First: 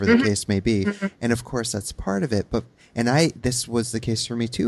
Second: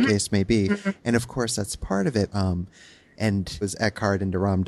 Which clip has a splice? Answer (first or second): second